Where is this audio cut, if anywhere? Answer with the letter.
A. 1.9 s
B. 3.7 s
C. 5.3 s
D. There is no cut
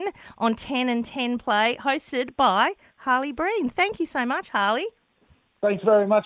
D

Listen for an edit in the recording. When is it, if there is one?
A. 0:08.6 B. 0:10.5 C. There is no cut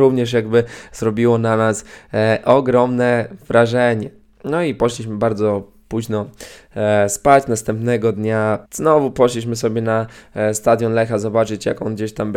A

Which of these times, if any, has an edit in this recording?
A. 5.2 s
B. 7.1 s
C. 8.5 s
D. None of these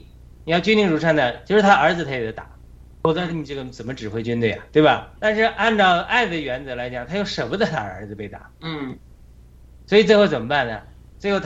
A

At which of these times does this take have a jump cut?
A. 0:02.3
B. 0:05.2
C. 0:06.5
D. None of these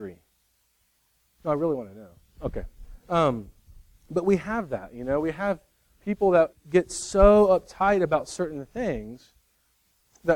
C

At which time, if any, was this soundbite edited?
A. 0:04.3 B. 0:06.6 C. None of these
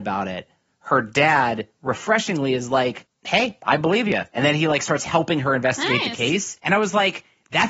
C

